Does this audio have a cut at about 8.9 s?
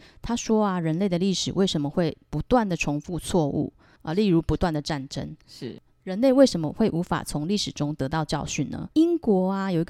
yes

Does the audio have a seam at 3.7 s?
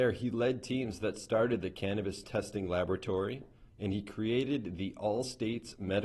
yes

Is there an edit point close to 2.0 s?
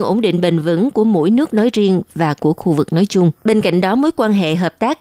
no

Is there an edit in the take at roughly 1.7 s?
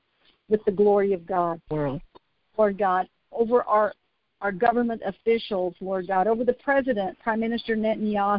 yes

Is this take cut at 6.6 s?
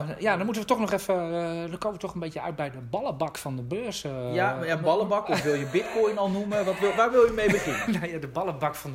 no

